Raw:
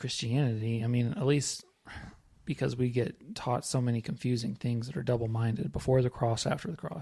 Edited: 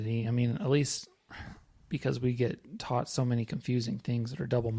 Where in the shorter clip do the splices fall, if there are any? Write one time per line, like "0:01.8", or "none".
none

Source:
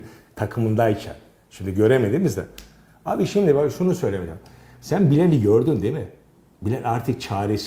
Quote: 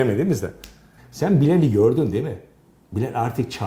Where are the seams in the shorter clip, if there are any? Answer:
0:01.0

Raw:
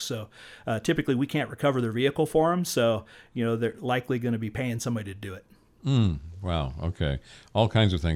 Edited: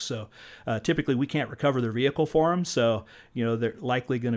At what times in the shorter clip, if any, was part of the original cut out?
none

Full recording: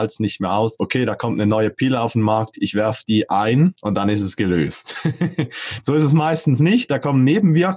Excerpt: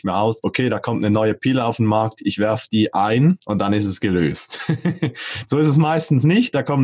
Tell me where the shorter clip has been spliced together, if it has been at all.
none

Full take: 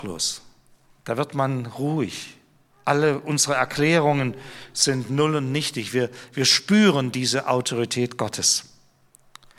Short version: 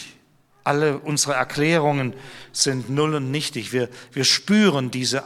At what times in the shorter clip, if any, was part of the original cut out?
none

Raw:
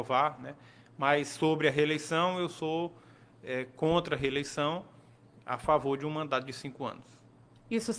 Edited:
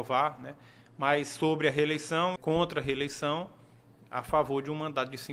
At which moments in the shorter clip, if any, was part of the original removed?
0:02.4

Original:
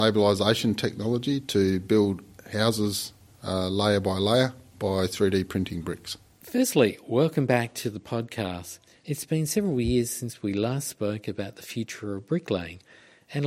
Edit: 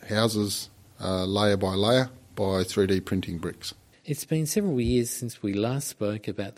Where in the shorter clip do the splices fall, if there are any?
0:03.9

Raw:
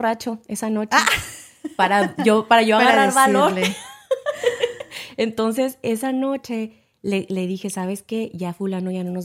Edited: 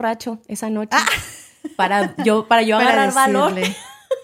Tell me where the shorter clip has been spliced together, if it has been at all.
none

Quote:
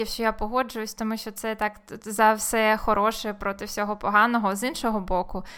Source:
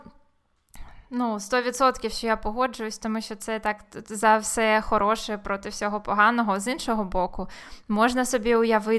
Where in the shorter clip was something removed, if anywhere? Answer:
none

